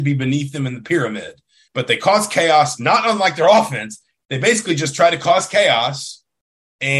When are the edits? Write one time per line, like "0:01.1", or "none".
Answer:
0:01.7